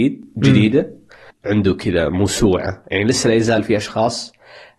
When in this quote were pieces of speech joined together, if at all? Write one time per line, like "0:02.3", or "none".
0:01.3
0:02.8